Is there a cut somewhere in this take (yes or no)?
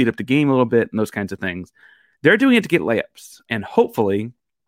yes